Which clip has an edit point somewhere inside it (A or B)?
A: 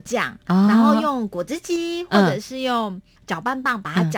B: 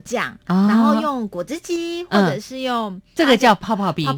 B